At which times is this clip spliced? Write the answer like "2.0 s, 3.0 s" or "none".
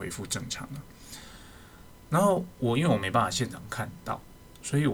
none